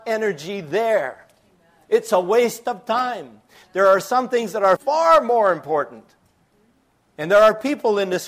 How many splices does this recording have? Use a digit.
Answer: 1